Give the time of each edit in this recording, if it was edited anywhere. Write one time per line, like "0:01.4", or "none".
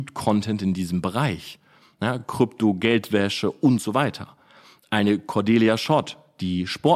none